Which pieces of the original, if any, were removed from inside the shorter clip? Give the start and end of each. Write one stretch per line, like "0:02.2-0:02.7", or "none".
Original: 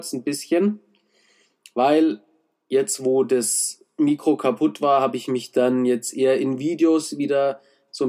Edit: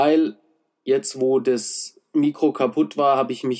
none